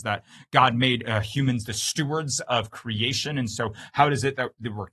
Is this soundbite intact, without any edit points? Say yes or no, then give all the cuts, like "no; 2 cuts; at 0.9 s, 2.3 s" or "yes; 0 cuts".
yes; 0 cuts